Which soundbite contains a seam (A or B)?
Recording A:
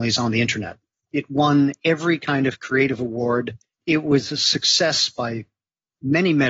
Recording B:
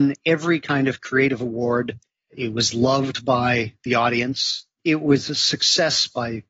A